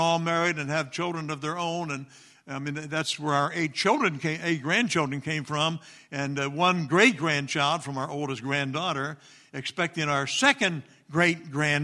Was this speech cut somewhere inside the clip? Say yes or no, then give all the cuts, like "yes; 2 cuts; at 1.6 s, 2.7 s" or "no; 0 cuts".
no; 0 cuts